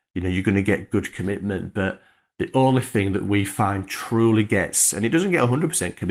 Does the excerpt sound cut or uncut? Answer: uncut